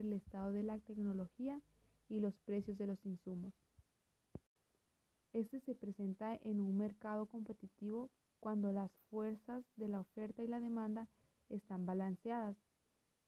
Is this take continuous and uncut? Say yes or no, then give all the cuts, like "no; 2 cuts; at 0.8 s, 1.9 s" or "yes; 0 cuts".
no; 1 cut; at 5.2 s